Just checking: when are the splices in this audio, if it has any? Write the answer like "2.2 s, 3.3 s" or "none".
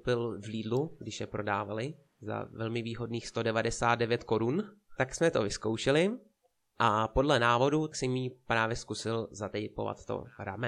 none